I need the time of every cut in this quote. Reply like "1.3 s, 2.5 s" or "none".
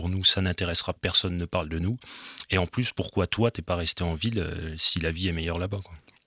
1.0 s